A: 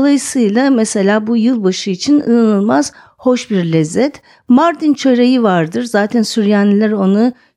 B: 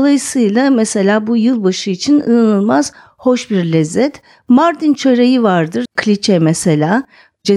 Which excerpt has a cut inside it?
B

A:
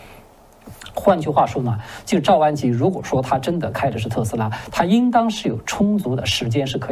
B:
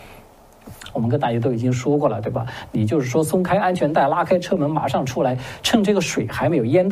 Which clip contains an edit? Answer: B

